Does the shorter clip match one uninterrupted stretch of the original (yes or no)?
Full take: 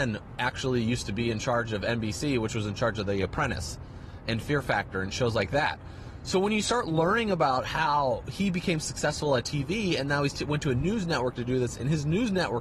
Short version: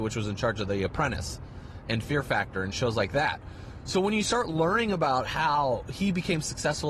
yes